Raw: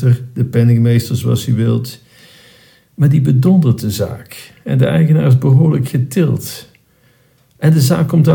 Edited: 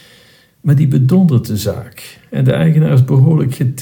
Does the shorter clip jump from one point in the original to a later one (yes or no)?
no